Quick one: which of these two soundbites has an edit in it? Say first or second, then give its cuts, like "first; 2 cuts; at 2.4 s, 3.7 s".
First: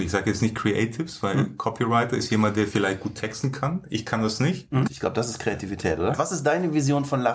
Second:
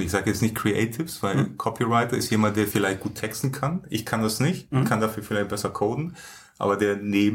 first; 2 cuts; at 4.9 s, 6.1 s